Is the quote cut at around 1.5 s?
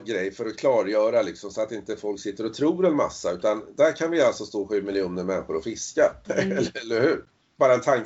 no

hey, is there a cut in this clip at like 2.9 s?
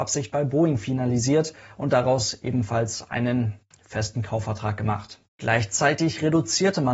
no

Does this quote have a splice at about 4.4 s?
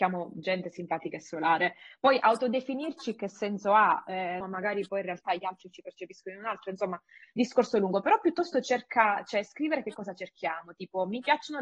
yes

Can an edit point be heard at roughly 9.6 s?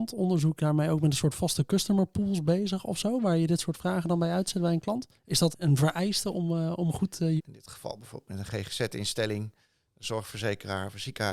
no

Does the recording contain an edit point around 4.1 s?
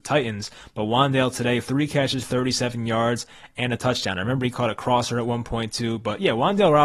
no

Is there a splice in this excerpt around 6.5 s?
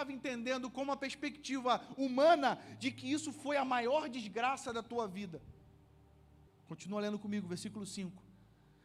yes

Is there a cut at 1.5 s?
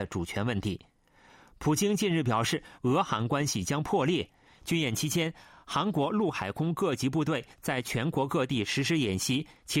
no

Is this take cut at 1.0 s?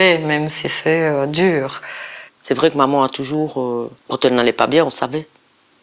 no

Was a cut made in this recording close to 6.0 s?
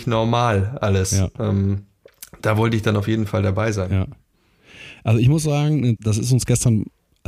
yes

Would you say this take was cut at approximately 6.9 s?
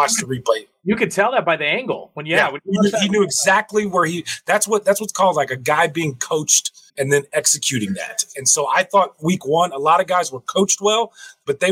yes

